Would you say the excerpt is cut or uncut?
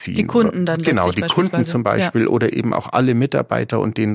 uncut